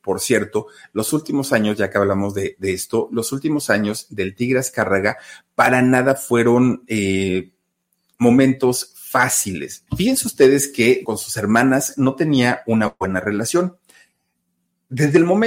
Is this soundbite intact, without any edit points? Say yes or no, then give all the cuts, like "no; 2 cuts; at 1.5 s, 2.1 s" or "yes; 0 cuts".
no; 2 cuts; at 9.9 s, 11.0 s